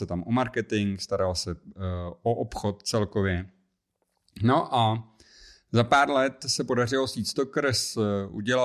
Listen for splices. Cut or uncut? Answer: uncut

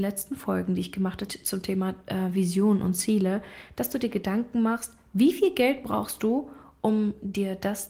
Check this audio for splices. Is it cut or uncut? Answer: cut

